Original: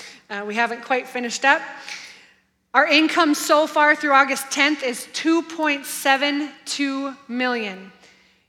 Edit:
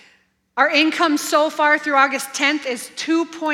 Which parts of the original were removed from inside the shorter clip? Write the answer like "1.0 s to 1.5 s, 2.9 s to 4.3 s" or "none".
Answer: none